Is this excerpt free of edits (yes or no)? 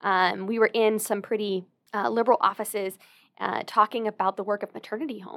yes